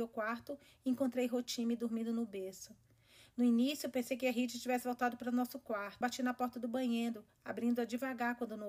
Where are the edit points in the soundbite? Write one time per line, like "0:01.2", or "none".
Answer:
0:06.0